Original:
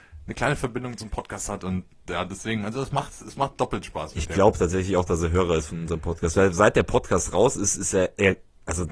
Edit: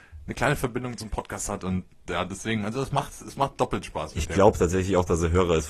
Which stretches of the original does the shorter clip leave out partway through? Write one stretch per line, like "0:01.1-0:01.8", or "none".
none